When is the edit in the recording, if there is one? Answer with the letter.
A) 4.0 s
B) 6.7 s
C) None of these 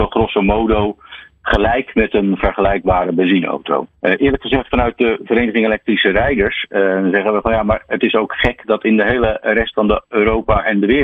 A